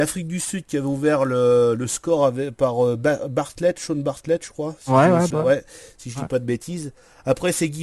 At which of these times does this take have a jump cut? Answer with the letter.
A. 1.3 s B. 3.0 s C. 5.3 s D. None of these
C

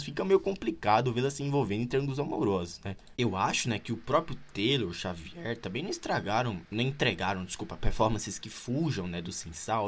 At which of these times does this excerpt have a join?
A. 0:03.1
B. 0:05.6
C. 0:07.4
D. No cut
A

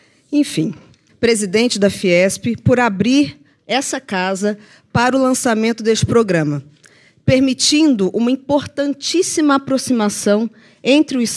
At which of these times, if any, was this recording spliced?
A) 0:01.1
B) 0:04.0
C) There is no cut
A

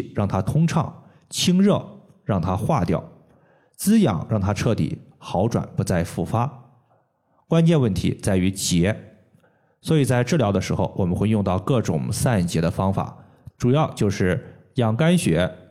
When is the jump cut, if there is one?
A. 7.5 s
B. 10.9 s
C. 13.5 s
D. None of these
C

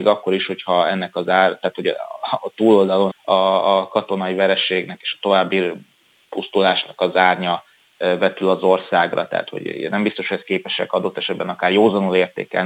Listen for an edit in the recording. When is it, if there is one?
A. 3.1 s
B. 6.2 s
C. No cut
A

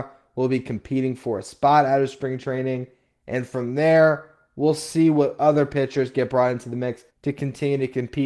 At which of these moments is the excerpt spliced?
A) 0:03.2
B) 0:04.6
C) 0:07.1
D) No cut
C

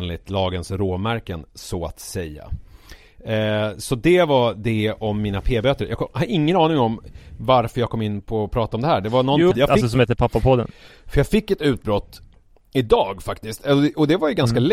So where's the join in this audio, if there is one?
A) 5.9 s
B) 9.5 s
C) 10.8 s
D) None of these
B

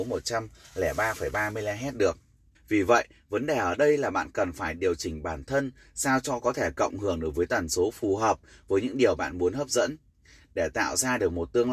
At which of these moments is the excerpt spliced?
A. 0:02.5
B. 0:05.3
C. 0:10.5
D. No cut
A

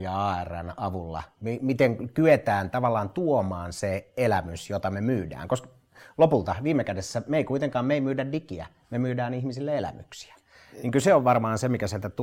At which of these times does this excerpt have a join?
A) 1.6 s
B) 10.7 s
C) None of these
C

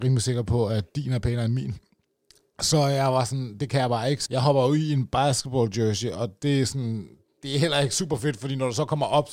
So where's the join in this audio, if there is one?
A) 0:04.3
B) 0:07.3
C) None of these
A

